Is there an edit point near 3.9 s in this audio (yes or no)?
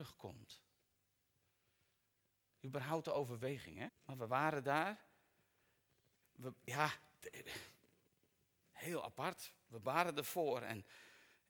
yes